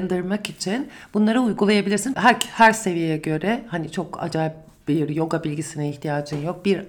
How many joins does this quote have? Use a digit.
1